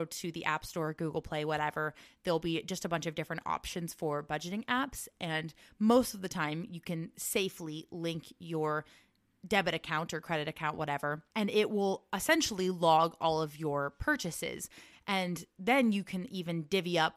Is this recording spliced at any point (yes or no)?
no